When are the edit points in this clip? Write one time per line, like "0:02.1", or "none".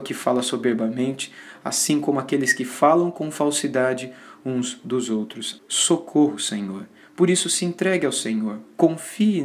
0:05.6
0:07.0